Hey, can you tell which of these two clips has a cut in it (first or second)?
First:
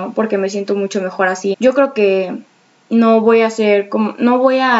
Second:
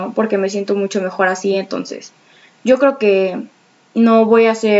first